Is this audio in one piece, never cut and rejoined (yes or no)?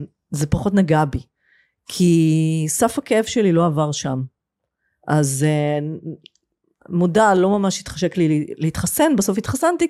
yes